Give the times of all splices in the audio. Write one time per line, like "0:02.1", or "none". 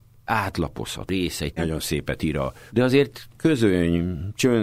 0:01.6
0:02.7